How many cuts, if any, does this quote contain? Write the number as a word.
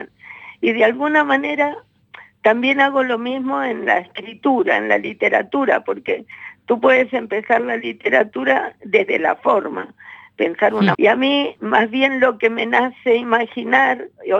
one